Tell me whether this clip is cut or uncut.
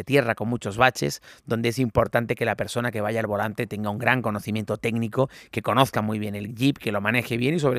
uncut